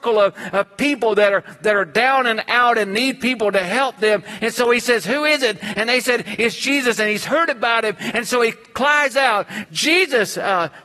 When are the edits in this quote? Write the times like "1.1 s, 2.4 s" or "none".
4.4 s, 9.7 s

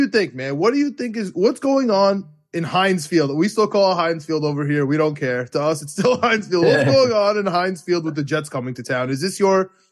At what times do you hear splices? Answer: none

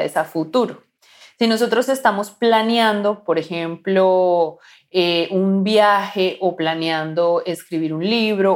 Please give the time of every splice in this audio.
none

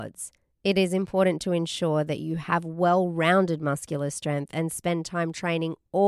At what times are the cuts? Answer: none

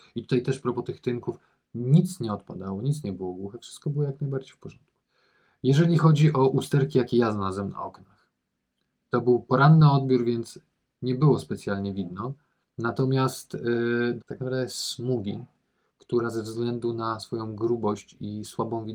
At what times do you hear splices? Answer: 14.2 s

